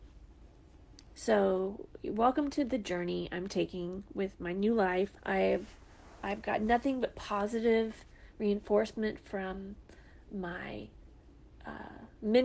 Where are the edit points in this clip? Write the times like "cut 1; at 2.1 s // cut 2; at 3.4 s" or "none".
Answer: cut 1; at 1.1 s // cut 2; at 5.2 s